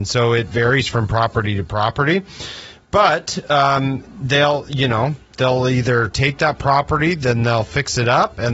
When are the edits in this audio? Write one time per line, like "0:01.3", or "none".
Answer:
none